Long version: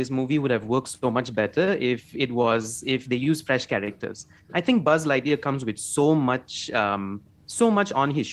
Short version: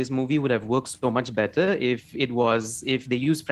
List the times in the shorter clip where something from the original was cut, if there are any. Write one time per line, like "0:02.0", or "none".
none